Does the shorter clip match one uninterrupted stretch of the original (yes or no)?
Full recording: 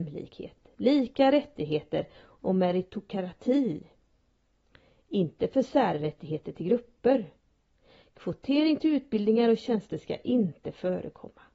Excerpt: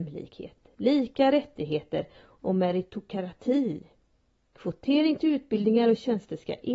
no